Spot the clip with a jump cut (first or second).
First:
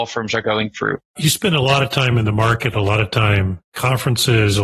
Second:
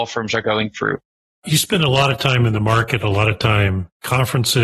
first